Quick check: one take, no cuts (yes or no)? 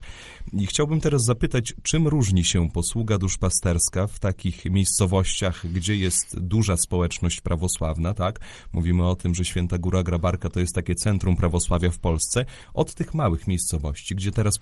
yes